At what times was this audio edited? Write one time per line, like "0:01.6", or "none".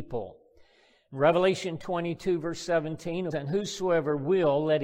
0:03.3